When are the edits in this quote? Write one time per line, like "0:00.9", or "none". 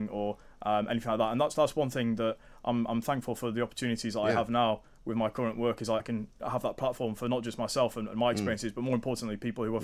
0:06.0